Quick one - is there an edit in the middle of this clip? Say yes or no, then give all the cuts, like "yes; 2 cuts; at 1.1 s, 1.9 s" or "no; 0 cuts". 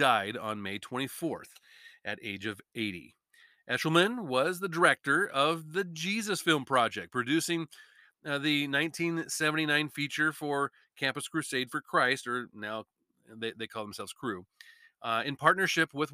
no; 0 cuts